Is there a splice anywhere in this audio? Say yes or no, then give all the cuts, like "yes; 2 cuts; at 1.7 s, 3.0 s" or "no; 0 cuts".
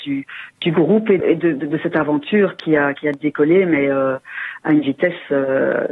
yes; 1 cut; at 1.2 s